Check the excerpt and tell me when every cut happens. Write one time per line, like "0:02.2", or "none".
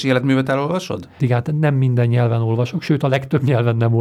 0:01.2